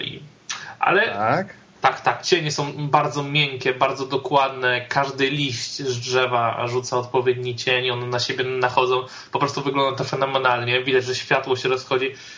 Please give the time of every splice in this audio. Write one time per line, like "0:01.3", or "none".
0:01.7

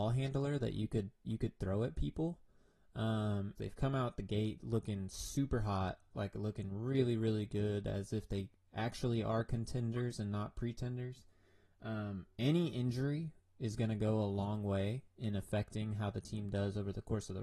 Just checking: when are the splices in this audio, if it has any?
0:03.6

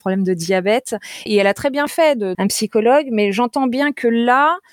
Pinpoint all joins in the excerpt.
0:01.3
0:02.3

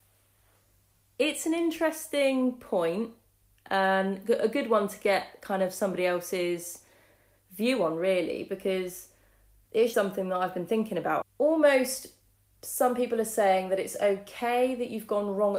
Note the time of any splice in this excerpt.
0:09.9
0:11.2

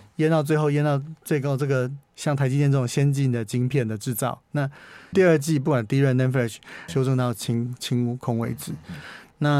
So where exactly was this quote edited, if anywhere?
0:05.1
0:06.9

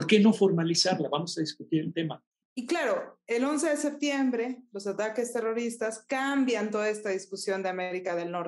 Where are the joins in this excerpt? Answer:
0:02.4

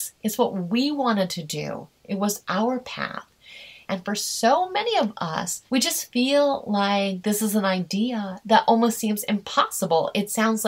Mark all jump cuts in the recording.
0:03.9
0:05.7

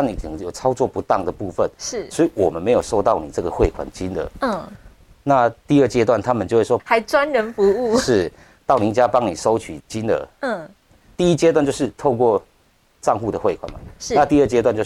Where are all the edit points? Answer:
0:06.8

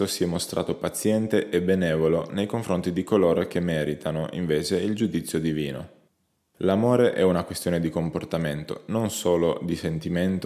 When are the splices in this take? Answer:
0:06.5

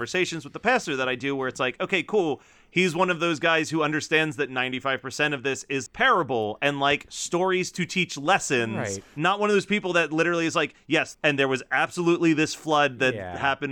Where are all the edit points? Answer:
0:05.9
0:11.1

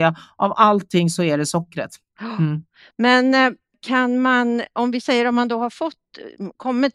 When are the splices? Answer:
none

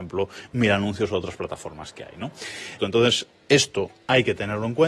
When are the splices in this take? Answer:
0:02.8

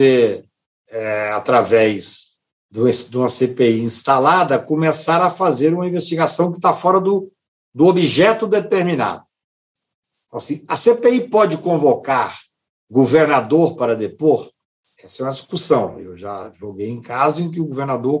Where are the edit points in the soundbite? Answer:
none

